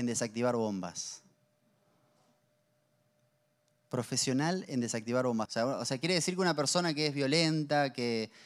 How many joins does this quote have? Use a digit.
1